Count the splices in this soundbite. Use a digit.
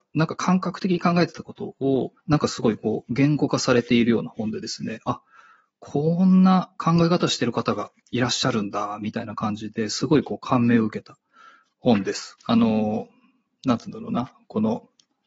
2